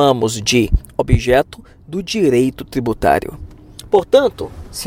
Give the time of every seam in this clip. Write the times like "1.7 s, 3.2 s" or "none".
none